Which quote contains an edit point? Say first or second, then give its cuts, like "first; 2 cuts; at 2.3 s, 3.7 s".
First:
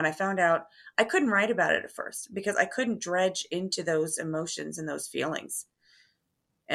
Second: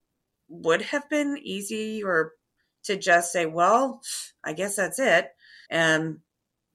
second; 1 cut; at 5.6 s